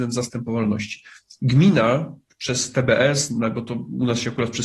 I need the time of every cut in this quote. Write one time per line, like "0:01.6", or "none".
none